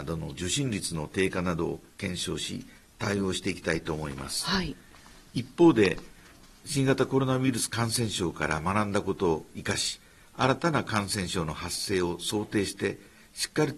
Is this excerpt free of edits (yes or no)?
yes